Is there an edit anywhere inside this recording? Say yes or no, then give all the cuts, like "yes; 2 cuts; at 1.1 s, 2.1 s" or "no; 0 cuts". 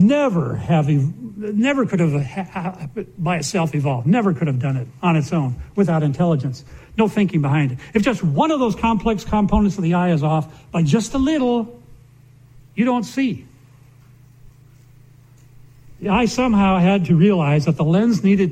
no; 0 cuts